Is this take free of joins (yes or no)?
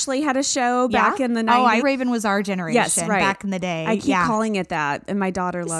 no